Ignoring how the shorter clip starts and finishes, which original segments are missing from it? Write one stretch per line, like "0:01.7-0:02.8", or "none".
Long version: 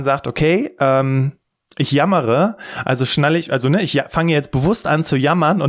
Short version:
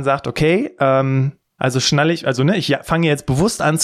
0:01.6-0:02.8